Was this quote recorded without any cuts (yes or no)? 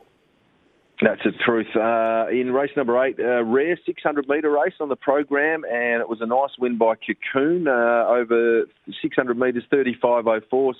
yes